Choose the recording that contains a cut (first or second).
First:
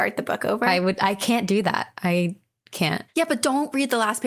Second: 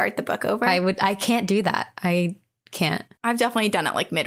first